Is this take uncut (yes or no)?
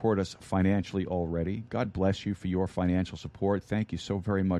yes